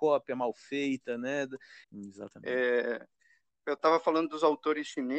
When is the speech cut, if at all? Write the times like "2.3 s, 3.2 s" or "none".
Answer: 1.8 s